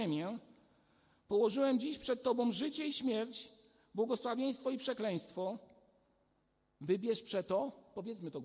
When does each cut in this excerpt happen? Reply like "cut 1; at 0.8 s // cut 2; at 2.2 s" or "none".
none